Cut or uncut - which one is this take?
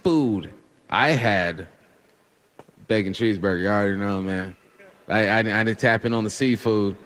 uncut